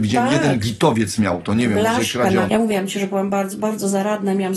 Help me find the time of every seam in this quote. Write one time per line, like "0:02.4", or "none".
0:02.5